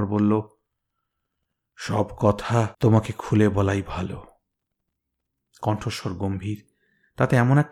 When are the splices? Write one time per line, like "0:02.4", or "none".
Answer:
0:02.7